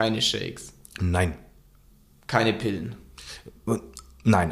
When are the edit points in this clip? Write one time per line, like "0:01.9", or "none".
none